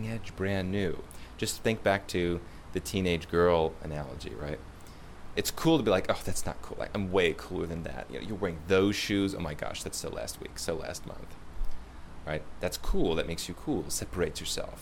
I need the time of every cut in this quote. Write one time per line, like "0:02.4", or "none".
0:05.3